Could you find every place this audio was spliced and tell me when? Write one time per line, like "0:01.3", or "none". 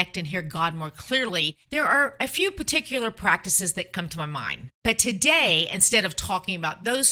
0:01.6
0:04.8